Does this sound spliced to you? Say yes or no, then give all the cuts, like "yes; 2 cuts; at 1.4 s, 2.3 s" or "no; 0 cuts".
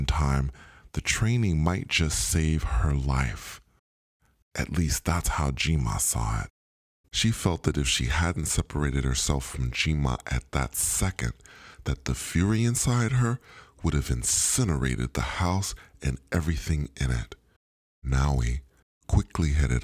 yes; 2 cuts; at 7.0 s, 17.9 s